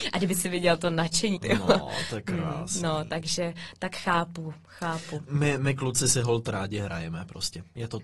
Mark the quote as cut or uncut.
cut